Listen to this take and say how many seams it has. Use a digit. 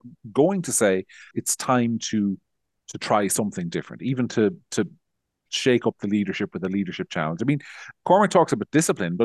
1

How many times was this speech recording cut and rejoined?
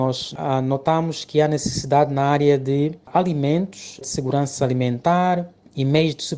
0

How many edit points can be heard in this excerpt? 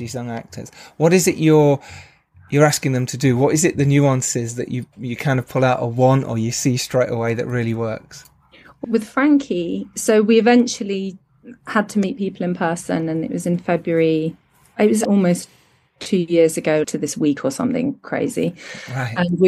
3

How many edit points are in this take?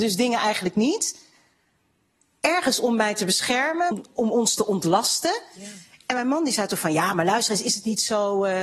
1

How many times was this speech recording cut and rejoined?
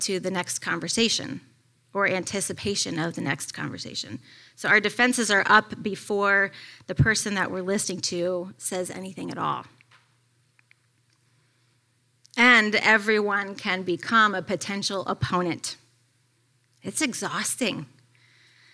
0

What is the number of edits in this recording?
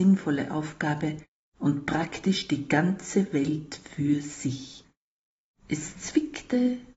1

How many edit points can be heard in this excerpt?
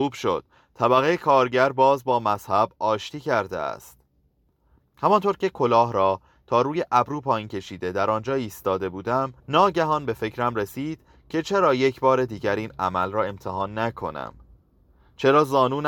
1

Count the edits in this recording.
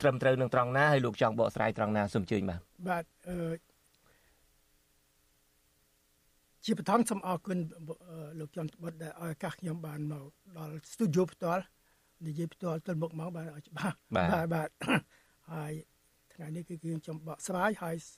0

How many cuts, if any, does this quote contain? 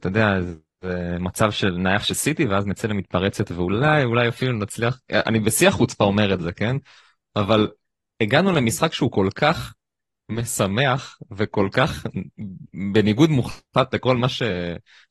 0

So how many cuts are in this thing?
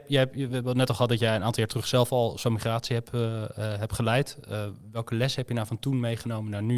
0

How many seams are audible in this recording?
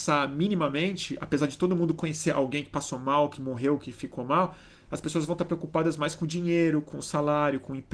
0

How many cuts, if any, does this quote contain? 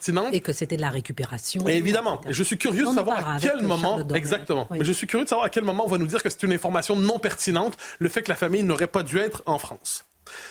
0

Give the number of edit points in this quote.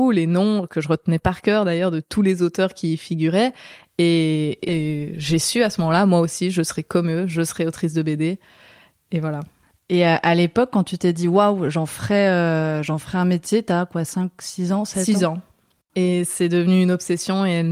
1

